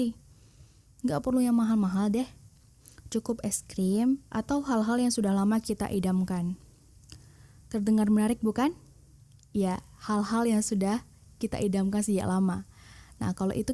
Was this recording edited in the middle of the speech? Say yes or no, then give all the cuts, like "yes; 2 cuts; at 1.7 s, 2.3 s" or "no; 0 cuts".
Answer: yes; 1 cut; at 4.3 s